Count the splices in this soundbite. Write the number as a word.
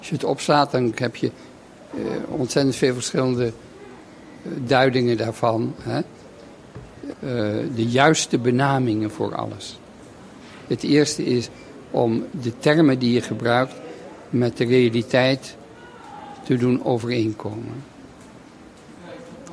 two